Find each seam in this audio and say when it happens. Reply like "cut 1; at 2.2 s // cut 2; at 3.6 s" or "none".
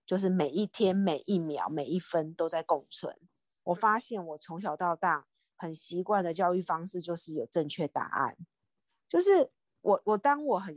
cut 1; at 3.6 s